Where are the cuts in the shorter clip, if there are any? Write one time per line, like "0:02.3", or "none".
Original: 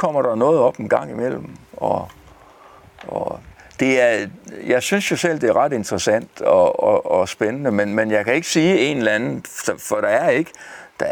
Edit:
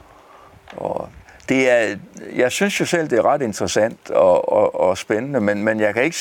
none